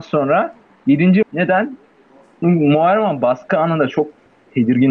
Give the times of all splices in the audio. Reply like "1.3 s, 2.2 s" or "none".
1.2 s